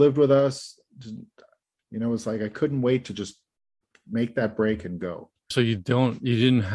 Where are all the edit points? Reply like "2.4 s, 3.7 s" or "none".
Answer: 1.8 s, 5.5 s